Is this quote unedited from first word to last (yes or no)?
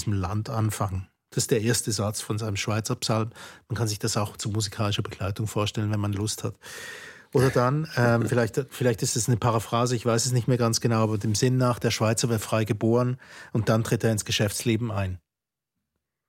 yes